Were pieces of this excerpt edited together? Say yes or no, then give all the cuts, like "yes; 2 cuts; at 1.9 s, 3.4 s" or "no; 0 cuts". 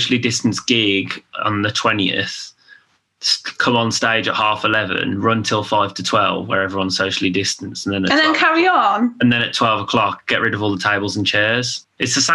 no; 0 cuts